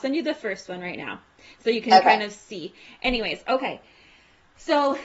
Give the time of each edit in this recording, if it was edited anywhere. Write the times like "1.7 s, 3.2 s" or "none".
none